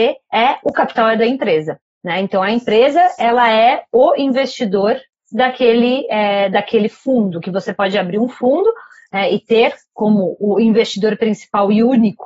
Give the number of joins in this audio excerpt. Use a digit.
0